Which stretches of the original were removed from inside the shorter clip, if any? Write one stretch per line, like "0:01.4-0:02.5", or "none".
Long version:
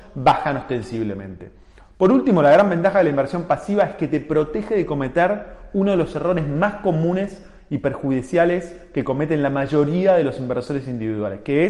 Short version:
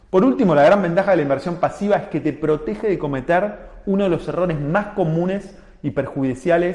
none